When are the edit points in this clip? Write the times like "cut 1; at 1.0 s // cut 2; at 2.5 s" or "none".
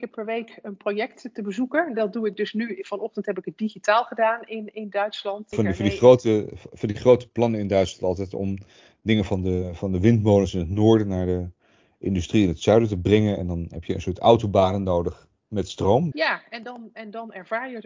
cut 1; at 5.5 s // cut 2; at 16.1 s